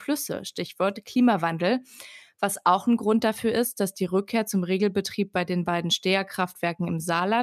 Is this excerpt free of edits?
yes; 0 cuts

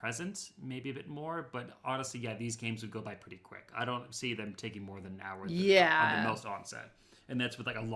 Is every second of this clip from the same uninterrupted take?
yes; 0 cuts

